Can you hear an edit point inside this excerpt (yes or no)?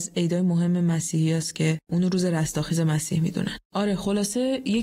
yes